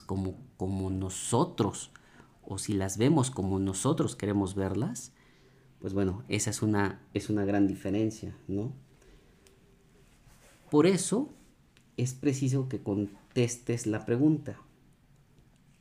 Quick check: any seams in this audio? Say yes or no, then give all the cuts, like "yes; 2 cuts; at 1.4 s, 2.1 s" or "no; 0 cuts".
yes; 1 cut; at 2.4 s